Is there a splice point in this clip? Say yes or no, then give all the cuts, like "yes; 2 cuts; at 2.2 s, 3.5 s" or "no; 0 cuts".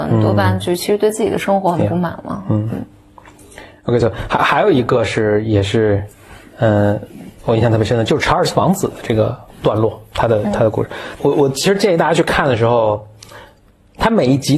no; 0 cuts